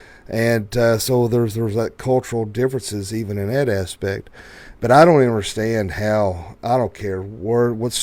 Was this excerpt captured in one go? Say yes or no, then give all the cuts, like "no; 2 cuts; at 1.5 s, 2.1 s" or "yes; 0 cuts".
yes; 0 cuts